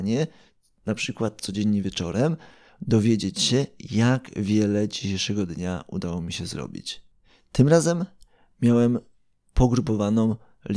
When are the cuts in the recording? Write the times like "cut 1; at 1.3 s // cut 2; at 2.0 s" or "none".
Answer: none